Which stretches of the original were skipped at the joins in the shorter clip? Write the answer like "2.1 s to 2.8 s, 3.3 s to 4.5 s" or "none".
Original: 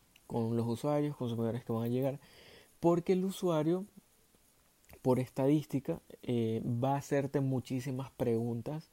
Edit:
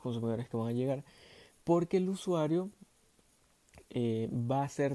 5.0 s to 6.2 s